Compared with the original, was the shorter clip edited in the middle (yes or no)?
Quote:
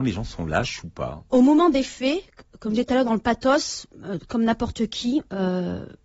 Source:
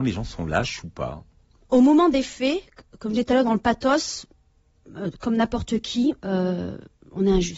yes